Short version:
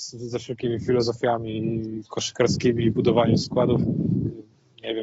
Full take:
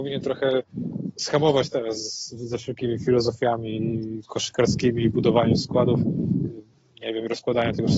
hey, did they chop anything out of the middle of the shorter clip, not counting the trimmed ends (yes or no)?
no